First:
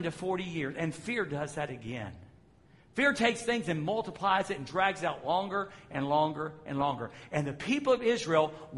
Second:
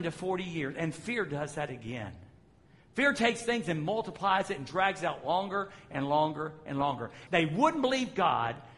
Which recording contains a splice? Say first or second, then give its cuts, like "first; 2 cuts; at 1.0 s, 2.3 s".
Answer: second; 1 cut; at 7.3 s